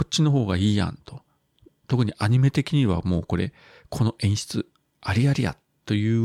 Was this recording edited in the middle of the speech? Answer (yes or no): no